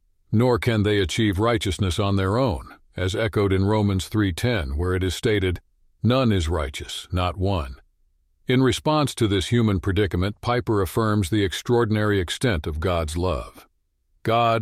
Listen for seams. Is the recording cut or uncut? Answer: cut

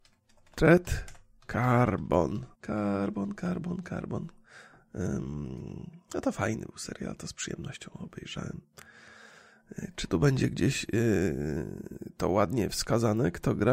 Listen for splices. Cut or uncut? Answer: cut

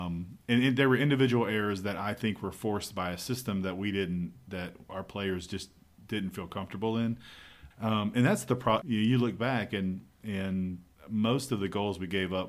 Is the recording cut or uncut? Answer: cut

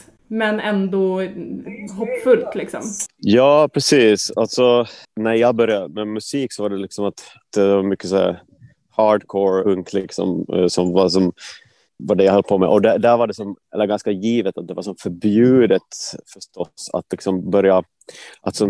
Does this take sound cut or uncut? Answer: cut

